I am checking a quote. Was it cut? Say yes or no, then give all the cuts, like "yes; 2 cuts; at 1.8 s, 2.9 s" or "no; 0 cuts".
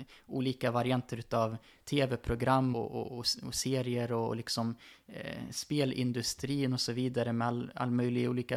yes; 1 cut; at 2.7 s